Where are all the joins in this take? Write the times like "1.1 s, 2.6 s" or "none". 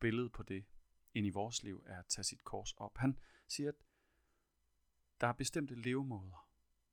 none